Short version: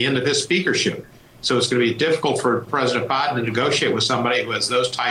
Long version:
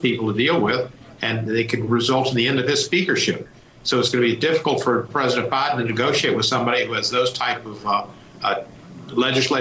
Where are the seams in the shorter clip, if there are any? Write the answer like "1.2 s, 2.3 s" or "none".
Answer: none